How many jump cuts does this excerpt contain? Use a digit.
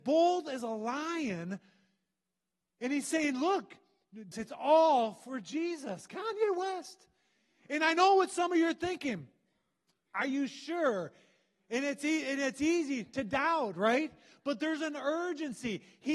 1